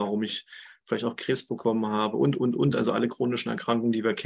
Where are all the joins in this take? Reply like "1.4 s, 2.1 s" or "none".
none